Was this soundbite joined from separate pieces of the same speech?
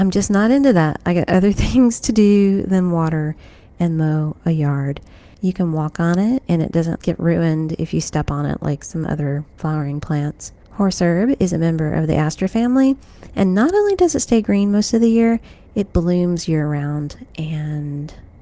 yes; 3 cuts; at 5.3 s, 7.0 s, 10.6 s

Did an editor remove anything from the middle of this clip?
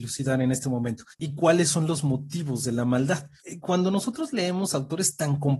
yes; 1 cut; at 1.1 s

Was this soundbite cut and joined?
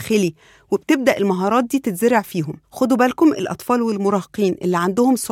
yes; 1 cut; at 2.6 s

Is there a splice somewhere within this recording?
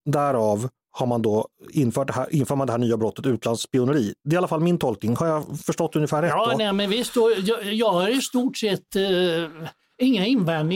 no; 0 cuts

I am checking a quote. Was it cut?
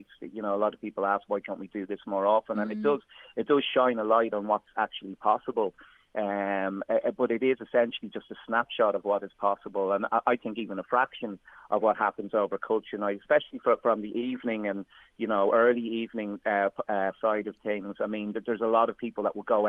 no; 0 cuts

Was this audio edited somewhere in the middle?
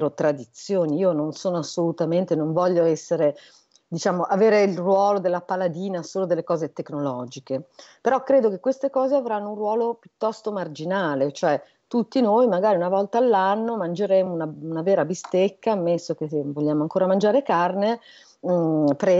no; 0 cuts

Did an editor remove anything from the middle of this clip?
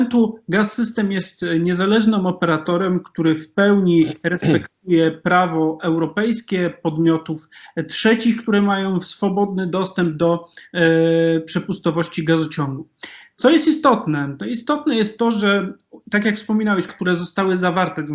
yes; 1 cut; at 16.9 s

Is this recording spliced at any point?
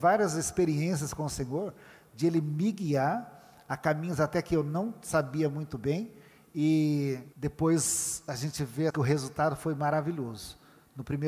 yes; 2 cuts; at 7.3 s, 8.9 s

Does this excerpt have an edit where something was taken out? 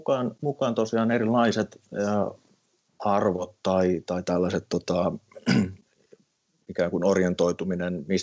no; 0 cuts

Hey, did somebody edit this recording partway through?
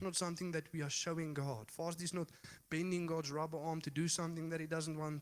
no; 0 cuts

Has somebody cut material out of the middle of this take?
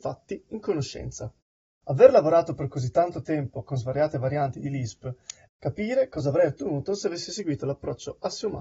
yes; 2 cuts; at 1.7 s, 5.5 s

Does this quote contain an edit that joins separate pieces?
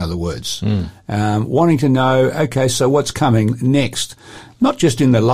no; 0 cuts

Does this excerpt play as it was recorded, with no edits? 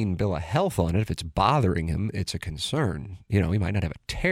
yes; 0 cuts

